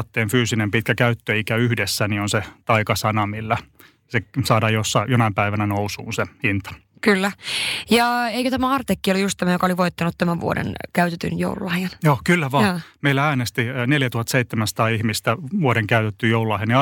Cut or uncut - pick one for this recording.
uncut